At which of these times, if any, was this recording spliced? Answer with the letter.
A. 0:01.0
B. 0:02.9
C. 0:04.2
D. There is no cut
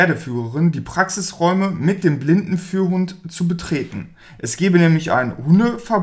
D